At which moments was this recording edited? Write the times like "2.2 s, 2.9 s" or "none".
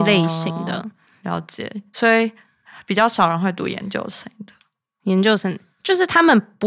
none